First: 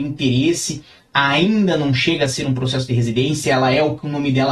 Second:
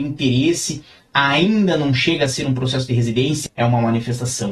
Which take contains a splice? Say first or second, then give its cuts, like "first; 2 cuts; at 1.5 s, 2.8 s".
second; 1 cut; at 3.5 s